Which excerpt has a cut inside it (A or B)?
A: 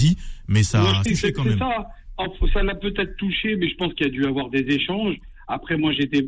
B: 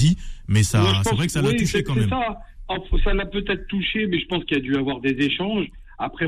A